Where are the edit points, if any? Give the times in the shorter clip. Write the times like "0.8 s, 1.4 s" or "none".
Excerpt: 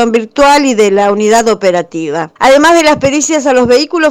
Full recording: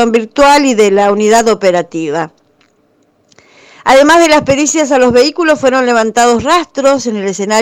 2.4 s